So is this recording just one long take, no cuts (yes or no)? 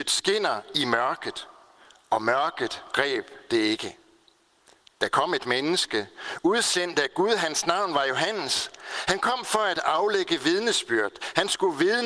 yes